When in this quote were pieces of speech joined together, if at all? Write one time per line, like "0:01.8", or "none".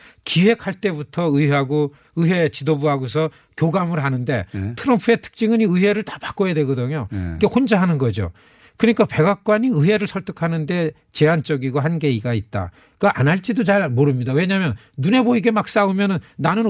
none